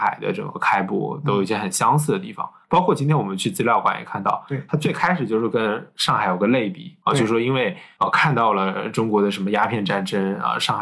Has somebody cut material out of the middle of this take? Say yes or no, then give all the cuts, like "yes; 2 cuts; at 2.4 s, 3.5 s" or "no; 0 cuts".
no; 0 cuts